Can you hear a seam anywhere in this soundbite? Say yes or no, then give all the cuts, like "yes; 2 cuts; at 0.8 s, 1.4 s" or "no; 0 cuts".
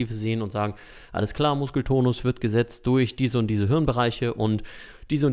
no; 0 cuts